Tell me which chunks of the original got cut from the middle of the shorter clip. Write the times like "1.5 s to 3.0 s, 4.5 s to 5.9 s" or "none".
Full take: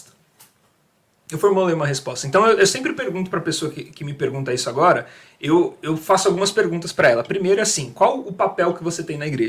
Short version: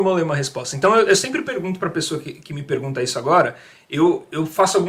none